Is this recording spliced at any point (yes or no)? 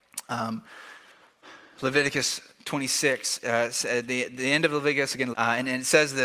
yes